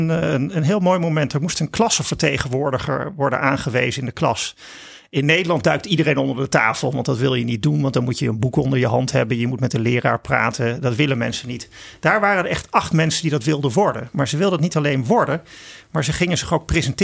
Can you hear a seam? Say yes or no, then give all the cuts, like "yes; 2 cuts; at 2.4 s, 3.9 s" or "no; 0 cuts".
no; 0 cuts